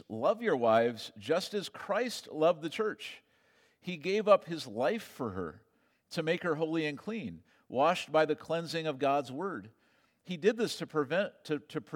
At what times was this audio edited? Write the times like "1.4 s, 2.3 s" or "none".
none